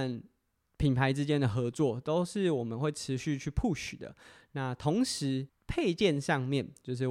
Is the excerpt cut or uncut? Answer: uncut